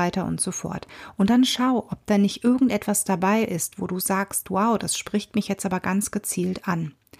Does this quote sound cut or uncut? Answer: uncut